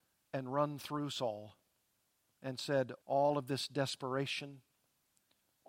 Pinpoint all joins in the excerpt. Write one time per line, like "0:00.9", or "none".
0:03.0